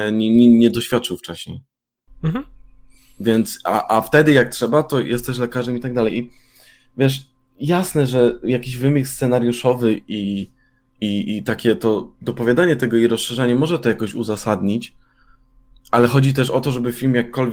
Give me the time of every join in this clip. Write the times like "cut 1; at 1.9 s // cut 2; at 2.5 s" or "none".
none